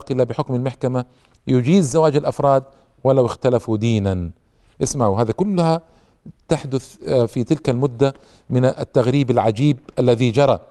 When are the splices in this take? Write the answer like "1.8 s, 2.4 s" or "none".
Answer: 6.3 s

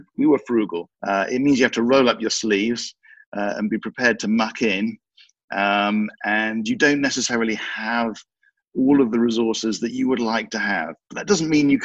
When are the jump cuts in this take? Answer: 0.9 s

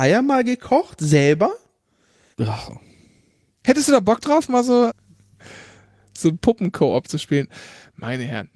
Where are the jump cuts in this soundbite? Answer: 2.3 s, 4.9 s

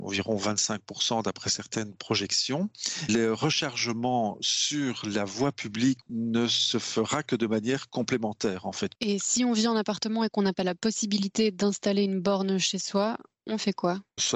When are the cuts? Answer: none

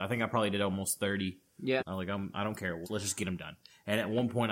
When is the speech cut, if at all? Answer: 1.8 s, 2.8 s

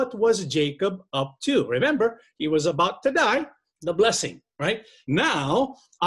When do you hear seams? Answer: 3.7 s, 5.0 s

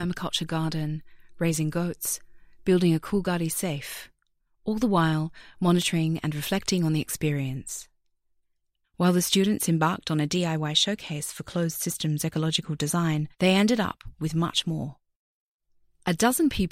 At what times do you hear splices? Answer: 8.8 s, 13.3 s

